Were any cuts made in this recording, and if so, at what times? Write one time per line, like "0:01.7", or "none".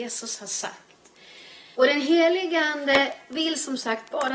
0:01.7